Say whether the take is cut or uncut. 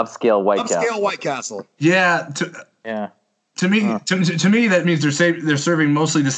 uncut